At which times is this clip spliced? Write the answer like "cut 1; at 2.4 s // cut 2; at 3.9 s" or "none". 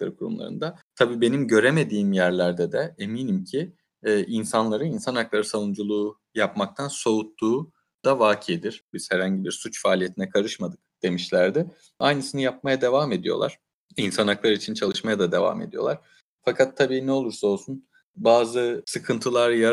cut 1; at 8.9 s